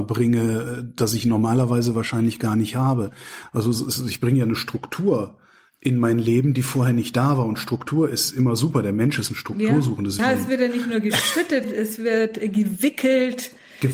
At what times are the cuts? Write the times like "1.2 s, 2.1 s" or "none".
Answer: 10.2 s, 11.6 s